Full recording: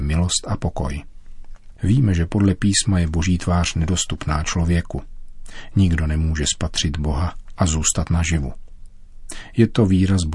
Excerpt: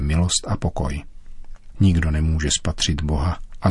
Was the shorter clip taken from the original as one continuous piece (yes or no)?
no